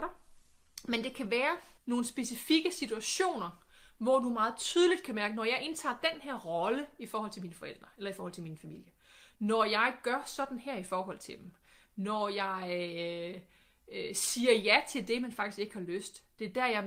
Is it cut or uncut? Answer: cut